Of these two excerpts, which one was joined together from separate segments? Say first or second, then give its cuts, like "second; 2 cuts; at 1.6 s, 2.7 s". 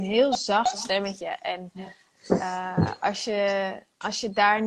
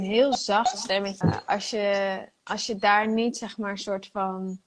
second; 1 cut; at 1.2 s